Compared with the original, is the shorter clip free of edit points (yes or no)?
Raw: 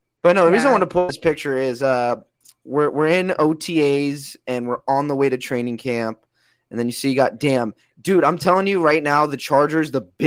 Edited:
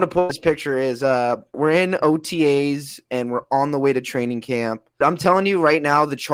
no